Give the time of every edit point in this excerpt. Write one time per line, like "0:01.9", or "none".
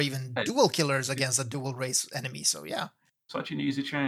none

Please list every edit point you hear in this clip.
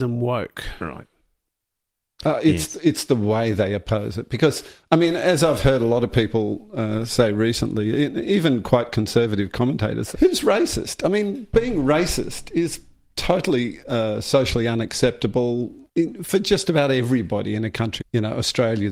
0:10.1
0:15.9
0:18.0

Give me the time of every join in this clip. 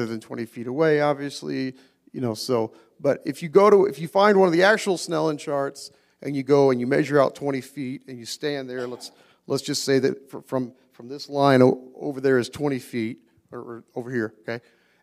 none

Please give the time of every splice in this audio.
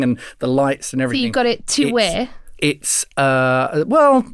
none

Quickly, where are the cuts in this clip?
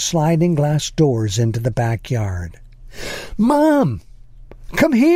none

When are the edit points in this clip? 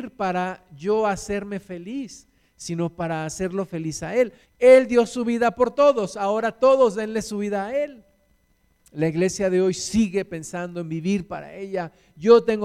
0:04.4
0:08.8

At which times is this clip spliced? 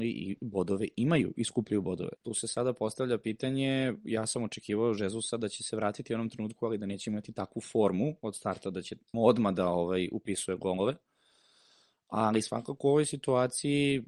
0:02.2
0:09.1

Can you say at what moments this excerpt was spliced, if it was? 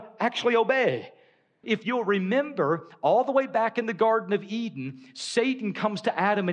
0:01.6

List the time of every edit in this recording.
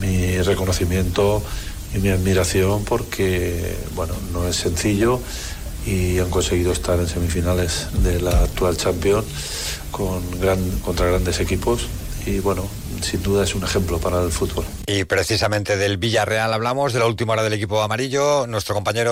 none

